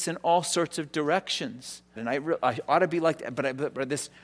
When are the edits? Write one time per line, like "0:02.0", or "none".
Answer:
0:02.0